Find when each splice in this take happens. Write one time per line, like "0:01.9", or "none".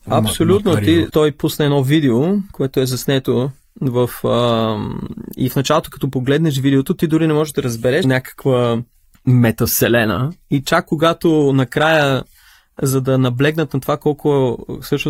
0:01.1
0:08.0